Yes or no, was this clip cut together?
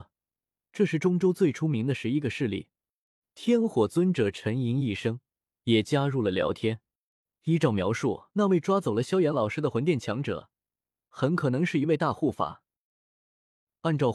yes